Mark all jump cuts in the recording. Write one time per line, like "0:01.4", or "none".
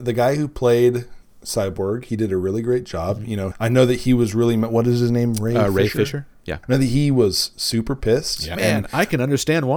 0:03.5
0:06.6
0:08.6